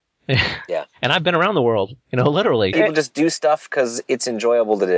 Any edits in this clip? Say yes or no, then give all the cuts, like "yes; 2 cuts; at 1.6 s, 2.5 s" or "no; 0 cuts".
yes; 1 cut; at 2.7 s